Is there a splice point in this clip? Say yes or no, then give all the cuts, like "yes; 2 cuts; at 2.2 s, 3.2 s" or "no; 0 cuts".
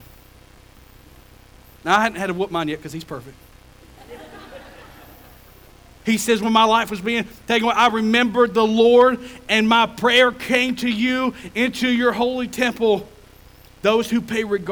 yes; 1 cut; at 6.0 s